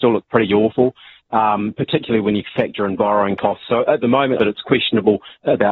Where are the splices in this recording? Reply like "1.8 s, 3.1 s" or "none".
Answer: 4.4 s